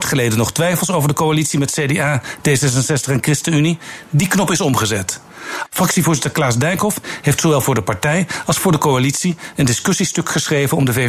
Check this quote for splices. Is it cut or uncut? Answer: cut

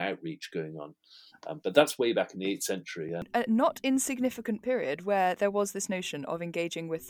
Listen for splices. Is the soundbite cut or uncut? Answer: uncut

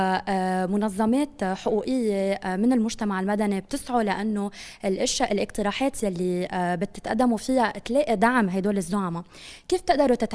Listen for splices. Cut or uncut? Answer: uncut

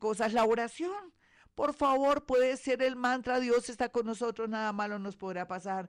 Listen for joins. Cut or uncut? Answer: uncut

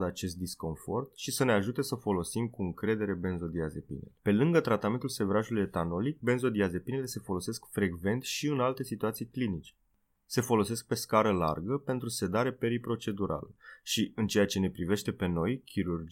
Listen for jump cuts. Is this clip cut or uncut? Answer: cut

